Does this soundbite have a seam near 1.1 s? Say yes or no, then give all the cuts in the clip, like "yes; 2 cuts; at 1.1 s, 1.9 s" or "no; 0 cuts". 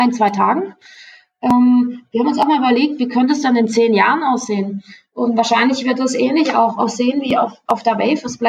no; 0 cuts